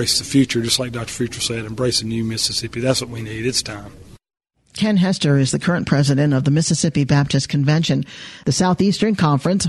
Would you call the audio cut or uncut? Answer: cut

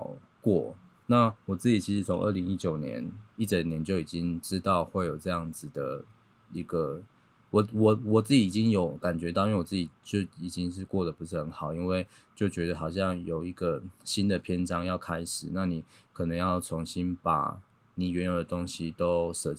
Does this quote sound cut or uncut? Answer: uncut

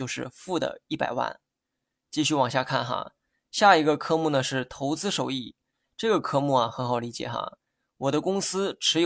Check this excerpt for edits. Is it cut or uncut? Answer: uncut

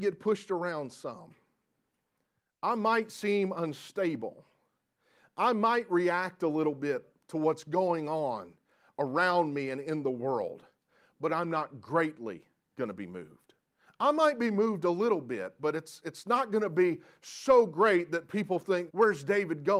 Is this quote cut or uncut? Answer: cut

